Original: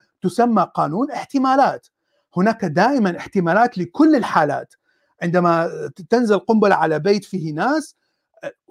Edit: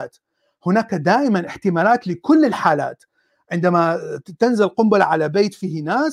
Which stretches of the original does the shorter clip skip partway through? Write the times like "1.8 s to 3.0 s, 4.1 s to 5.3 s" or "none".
none